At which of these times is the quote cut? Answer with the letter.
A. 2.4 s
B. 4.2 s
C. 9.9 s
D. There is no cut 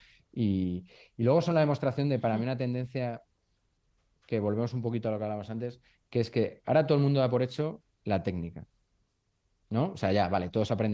D